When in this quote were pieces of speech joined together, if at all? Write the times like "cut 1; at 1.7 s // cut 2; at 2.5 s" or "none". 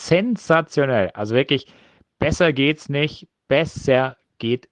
none